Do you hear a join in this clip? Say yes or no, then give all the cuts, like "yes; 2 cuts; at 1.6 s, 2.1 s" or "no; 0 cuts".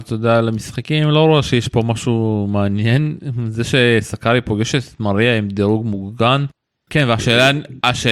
yes; 1 cut; at 6.9 s